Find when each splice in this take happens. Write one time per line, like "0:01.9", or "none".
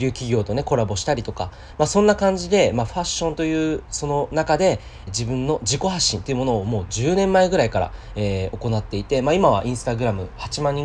0:05.1